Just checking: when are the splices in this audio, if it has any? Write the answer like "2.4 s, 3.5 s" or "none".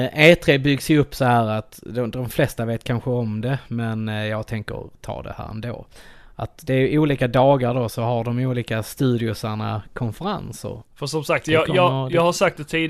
10.8 s